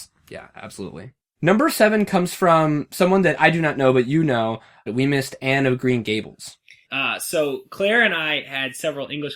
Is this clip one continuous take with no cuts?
no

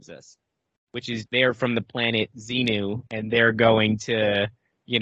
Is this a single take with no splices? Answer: no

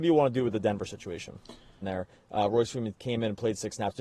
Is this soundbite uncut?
no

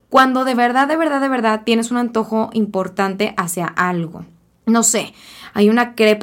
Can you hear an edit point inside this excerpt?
no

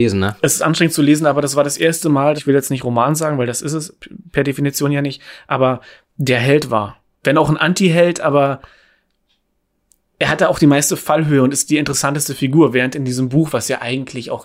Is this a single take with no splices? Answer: no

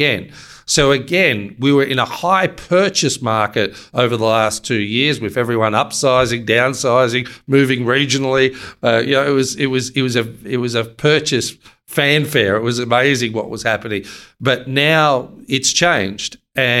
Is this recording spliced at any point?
no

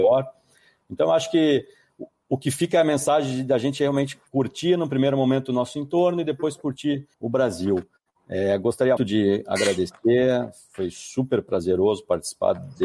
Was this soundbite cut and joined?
yes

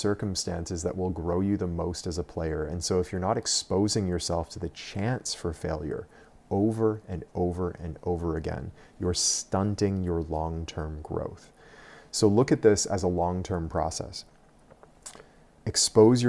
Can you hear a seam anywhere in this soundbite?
no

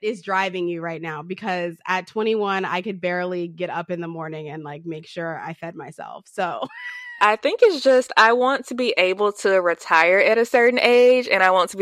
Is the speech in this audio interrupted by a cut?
no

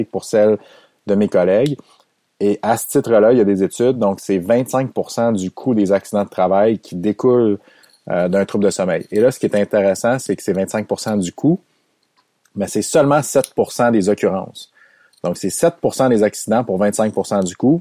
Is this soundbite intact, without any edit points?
yes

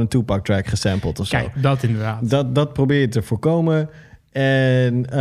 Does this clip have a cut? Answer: no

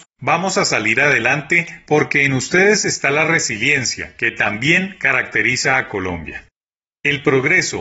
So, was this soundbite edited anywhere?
no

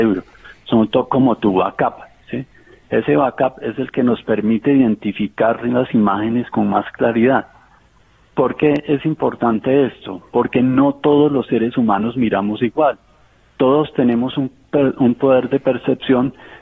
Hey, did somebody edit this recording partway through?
no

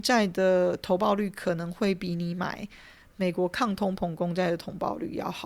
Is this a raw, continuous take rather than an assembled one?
yes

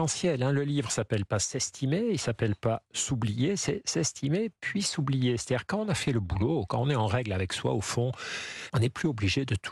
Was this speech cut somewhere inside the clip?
yes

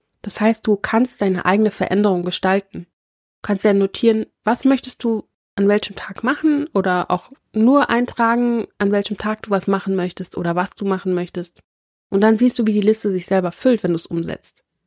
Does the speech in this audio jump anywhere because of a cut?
no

